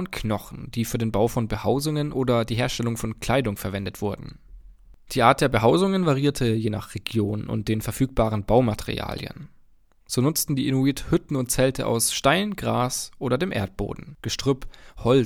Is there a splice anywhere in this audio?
no; 0 cuts

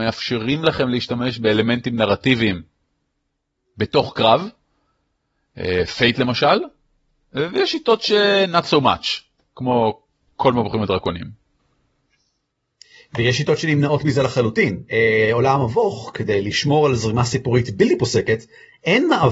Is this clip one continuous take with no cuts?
yes; 0 cuts

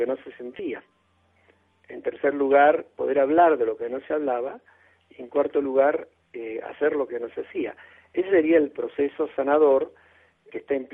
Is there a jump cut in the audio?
no; 0 cuts

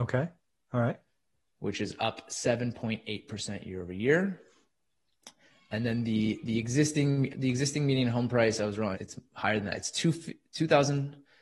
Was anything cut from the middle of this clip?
yes; 2 cuts; at 7.3 s, 8.9 s

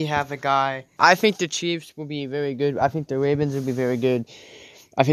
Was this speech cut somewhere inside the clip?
yes; 1 cut; at 1.0 s

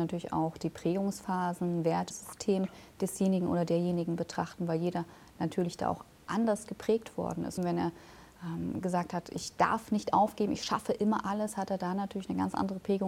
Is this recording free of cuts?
no; 2 cuts; at 2.1 s, 7.6 s

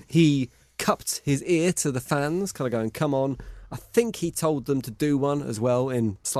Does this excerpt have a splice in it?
no; 0 cuts

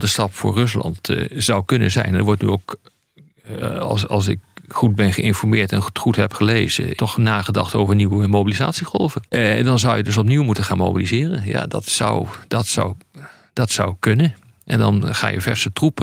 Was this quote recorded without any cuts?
no; 2 cuts; at 7.0 s, 9.3 s

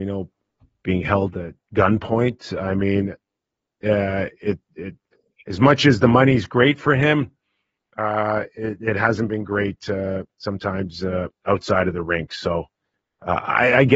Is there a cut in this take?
no; 0 cuts

